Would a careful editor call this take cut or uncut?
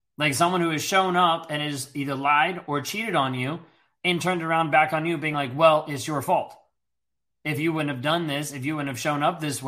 uncut